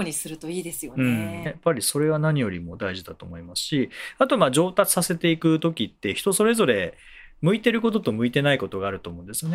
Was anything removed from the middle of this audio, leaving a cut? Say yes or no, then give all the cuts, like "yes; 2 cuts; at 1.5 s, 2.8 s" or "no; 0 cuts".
yes; 1 cut; at 1.5 s